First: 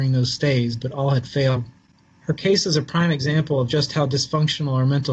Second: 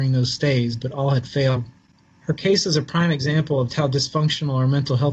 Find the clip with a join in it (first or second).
second